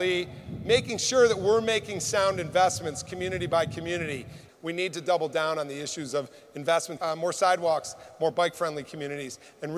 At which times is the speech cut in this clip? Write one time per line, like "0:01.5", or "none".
0:04.5
0:07.0